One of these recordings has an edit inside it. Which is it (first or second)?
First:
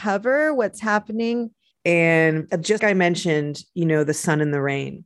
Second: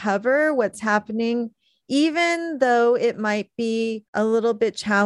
first